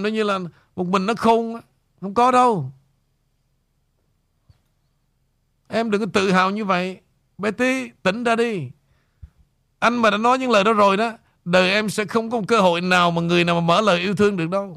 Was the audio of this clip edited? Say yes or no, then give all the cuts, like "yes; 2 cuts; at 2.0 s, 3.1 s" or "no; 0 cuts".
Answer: no; 0 cuts